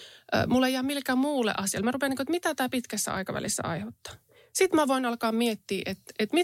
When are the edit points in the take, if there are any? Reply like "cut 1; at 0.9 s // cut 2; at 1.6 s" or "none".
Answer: none

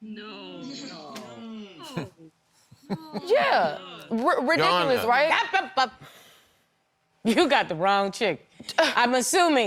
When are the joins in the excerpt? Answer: none

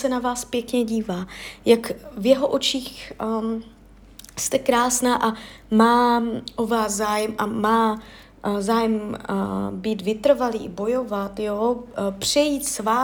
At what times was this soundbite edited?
none

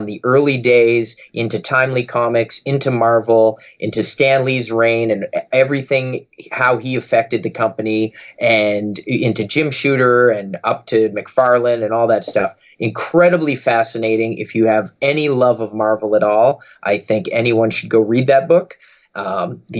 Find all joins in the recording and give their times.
none

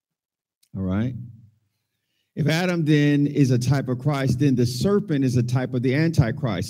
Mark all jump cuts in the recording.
none

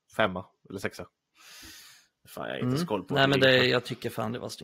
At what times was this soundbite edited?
none

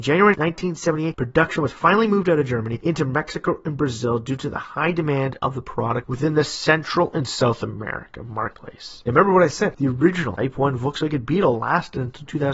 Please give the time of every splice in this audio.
cut 1; at 10.4 s

